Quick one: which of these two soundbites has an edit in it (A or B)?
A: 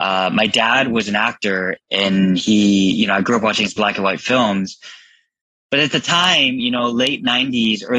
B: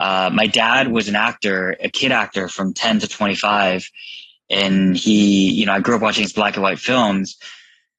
A